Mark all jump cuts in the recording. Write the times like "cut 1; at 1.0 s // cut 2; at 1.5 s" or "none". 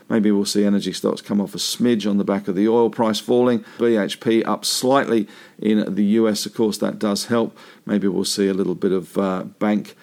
cut 1; at 3.8 s